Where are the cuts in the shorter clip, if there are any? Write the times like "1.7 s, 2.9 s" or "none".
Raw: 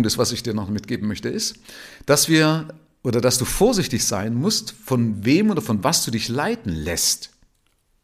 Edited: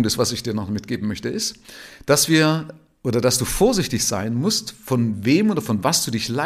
none